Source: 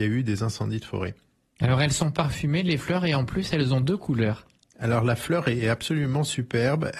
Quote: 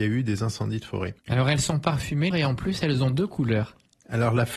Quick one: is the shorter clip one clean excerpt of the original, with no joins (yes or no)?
no